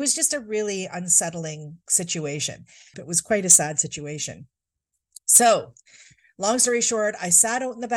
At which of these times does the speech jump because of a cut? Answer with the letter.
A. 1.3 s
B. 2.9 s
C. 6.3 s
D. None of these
B